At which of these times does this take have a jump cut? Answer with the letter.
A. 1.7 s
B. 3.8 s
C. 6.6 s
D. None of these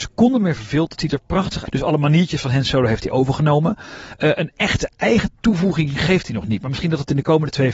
A